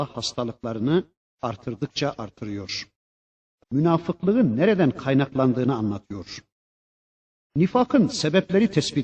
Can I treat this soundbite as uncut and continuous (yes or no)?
no